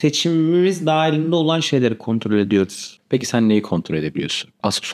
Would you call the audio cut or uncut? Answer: cut